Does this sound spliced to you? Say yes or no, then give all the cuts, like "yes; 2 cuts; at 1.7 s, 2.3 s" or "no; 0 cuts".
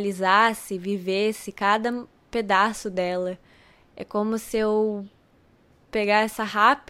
no; 0 cuts